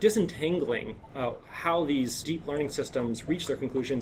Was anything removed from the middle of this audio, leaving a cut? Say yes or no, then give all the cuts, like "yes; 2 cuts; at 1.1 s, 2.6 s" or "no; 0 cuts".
yes; 1 cut; at 2.2 s